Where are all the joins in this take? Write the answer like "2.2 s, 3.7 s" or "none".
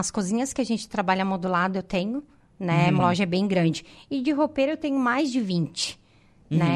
3.0 s